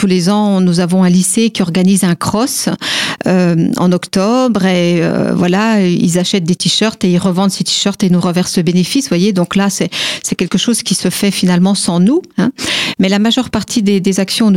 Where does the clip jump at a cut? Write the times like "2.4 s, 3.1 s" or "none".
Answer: none